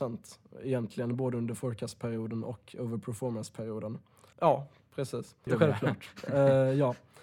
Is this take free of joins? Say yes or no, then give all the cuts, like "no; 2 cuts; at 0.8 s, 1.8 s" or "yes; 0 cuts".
no; 2 cuts; at 4.3 s, 5.5 s